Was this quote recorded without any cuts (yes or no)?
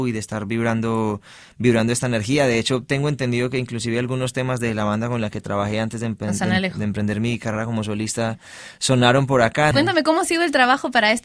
no